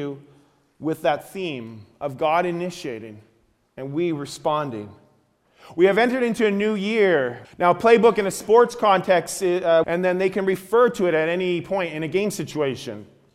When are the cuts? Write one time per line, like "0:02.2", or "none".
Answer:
0:07.4
0:09.8